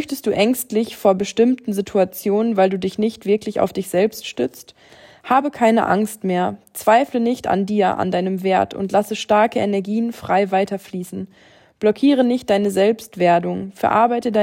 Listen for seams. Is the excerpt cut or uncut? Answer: uncut